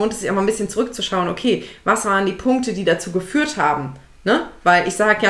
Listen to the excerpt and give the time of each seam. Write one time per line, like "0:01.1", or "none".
none